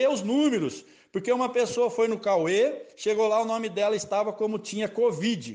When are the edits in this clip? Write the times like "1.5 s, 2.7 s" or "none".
none